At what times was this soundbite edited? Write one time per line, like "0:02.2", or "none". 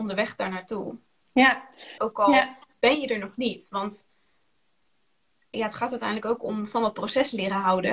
0:02.0